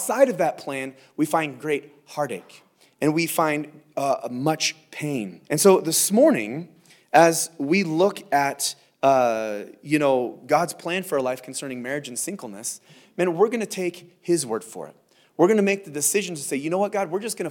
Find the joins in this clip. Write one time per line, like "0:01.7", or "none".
0:05.4